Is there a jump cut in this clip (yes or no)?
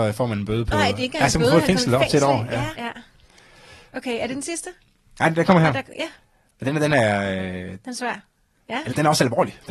yes